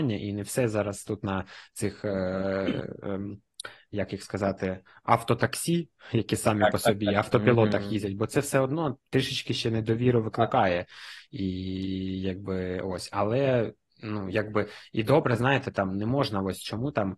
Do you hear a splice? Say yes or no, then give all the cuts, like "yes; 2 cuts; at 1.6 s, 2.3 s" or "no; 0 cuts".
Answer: yes; 1 cut; at 9.0 s